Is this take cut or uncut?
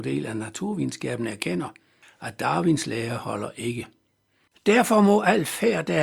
cut